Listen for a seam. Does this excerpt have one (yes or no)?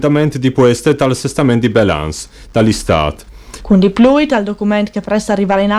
yes